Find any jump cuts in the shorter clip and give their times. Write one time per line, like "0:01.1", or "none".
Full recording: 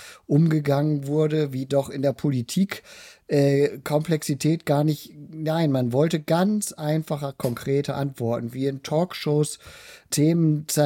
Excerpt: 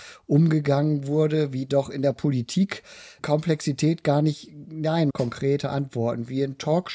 0:03.2
0:05.1